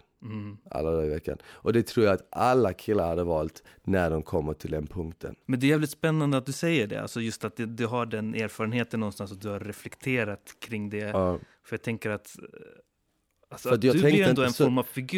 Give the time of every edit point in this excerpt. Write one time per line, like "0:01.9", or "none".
0:05.4